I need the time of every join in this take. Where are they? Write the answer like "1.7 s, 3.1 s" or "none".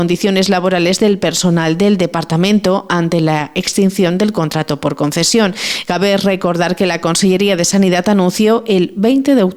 5.8 s